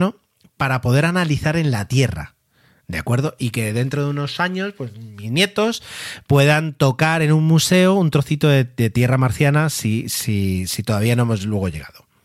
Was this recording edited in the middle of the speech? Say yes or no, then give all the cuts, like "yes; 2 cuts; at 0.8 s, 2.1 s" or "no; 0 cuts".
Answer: no; 0 cuts